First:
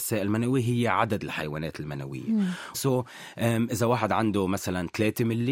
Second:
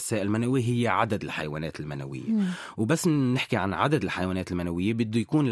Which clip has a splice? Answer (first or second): first